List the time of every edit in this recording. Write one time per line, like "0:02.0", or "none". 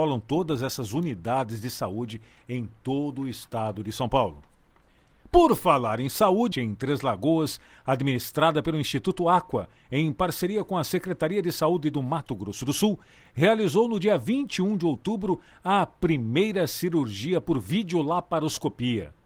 0:06.5

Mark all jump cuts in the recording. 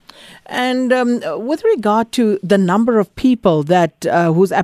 none

